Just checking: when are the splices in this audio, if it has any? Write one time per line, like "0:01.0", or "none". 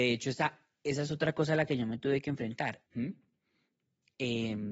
0:02.9